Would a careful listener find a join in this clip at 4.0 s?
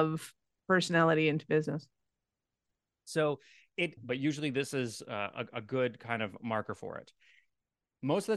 yes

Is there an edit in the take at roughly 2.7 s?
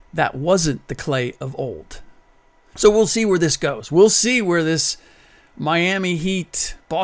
yes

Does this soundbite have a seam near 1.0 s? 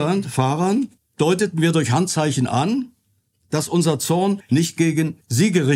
yes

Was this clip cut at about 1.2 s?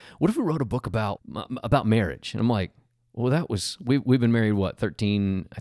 yes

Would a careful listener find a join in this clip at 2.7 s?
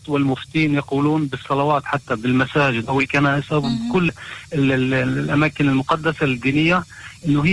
no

